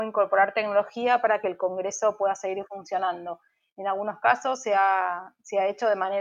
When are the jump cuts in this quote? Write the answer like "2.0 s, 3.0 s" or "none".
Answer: none